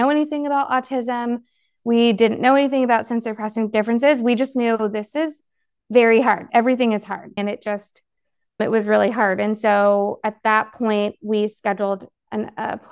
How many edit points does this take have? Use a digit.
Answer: 1